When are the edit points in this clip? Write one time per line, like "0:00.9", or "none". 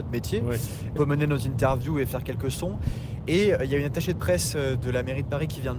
0:01.0